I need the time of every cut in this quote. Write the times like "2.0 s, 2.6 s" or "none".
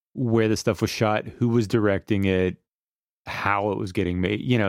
none